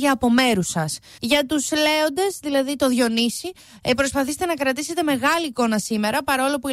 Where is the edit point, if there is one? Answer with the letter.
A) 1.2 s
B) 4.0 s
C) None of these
A